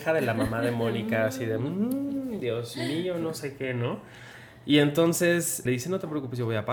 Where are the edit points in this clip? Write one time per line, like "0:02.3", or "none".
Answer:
0:05.7